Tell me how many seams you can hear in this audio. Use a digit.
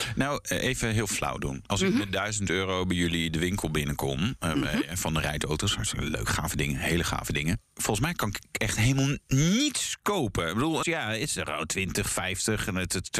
1